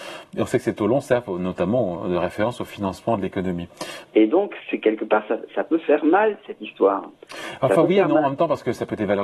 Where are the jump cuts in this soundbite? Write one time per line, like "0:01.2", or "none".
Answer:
0:04.0